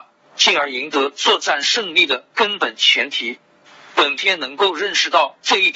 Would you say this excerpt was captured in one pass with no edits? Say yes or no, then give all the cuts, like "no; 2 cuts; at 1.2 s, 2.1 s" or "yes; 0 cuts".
yes; 0 cuts